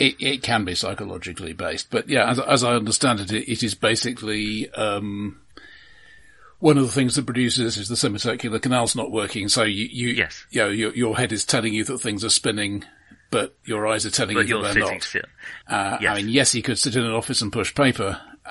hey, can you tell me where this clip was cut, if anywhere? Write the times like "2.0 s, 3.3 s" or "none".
15.6 s